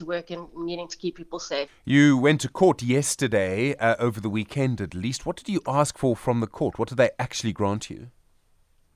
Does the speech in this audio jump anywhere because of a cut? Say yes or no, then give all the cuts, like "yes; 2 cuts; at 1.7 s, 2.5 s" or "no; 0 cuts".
yes; 1 cut; at 1.7 s